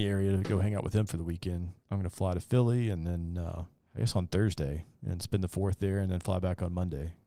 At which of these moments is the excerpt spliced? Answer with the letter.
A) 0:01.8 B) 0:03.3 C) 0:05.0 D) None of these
A